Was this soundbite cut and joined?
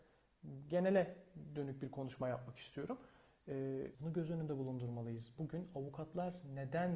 yes; 1 cut; at 3.9 s

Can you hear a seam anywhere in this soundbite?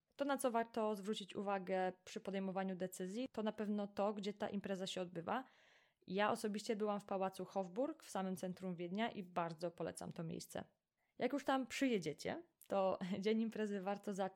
no; 0 cuts

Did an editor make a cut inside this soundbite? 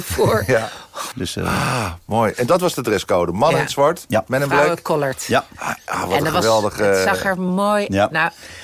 yes; 1 cut; at 1.1 s

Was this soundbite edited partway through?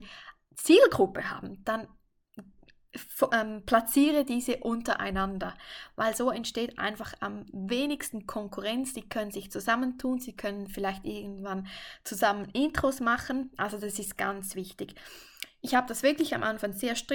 no; 0 cuts

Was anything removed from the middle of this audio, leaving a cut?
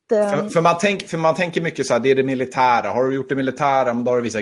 no; 0 cuts

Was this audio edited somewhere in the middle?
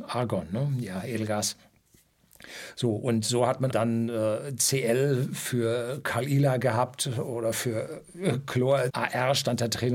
yes; 2 cuts; at 3.7 s, 8.9 s

